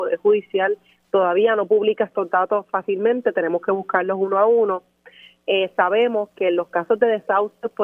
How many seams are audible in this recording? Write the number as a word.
zero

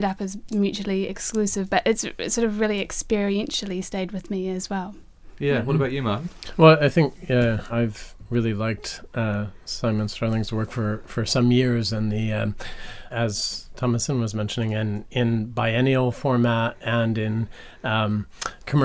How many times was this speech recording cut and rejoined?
two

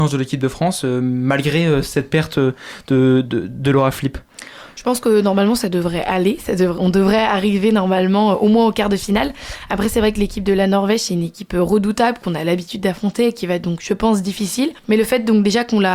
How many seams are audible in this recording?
one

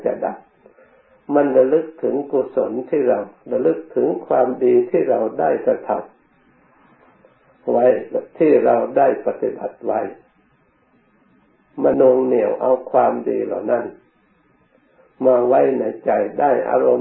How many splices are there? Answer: one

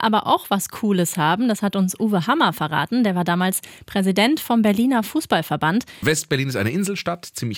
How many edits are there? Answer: one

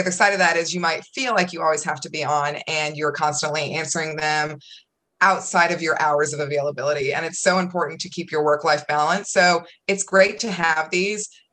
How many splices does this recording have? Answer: zero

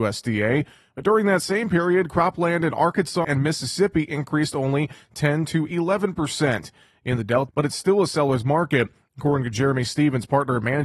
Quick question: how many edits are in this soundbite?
two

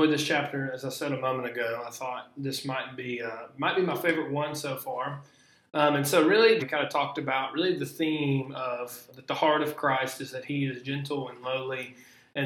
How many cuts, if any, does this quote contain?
two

